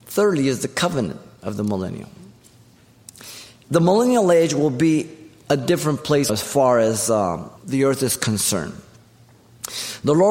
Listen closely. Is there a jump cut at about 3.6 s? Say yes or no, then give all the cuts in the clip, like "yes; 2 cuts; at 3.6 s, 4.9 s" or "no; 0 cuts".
no; 2 cuts; at 6.3 s, 7.6 s